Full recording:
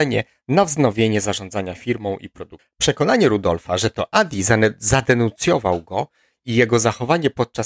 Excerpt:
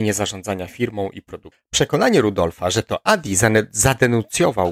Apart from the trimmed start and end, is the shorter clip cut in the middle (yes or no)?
no